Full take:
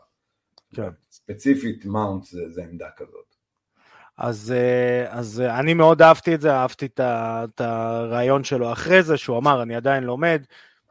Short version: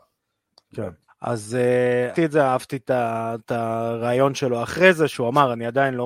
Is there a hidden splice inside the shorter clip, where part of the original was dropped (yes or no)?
yes